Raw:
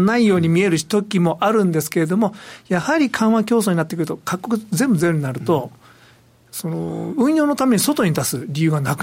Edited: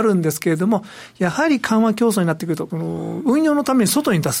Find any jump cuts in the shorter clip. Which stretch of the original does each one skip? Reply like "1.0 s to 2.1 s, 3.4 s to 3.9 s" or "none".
4.2 s to 6.6 s